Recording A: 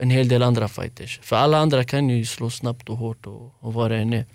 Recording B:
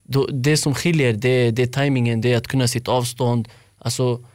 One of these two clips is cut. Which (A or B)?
B